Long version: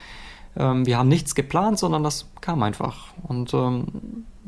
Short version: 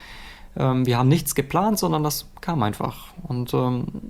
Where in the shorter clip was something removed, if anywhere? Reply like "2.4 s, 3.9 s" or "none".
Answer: none